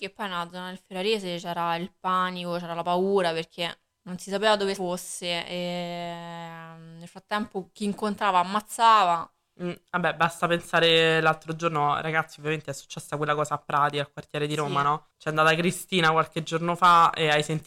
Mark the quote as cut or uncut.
cut